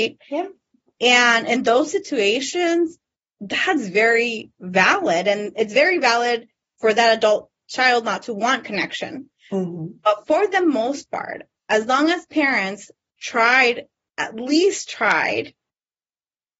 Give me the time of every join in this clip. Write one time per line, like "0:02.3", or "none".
none